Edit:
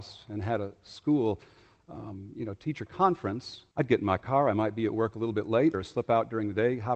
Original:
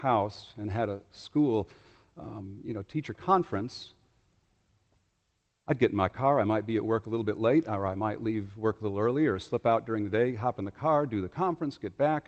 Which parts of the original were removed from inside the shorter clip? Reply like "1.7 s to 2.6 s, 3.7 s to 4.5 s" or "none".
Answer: 4.0 s to 5.6 s, 7.6 s to 9.3 s